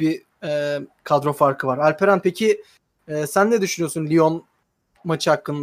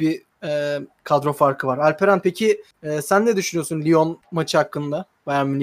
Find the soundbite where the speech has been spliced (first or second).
second